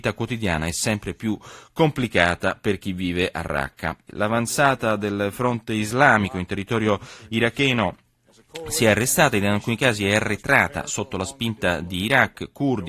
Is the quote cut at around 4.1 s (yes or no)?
yes